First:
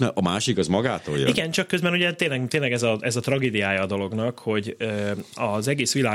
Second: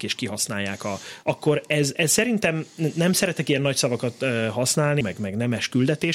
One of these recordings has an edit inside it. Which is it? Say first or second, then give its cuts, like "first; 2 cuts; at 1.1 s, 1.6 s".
second; 2 cuts; at 1.2 s, 5.0 s